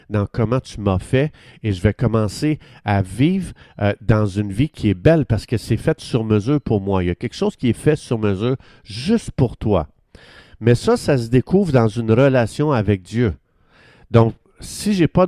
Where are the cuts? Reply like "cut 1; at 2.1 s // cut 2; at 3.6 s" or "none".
none